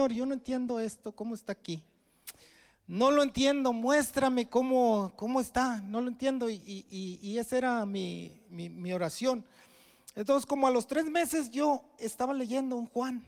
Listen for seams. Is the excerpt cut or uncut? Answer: uncut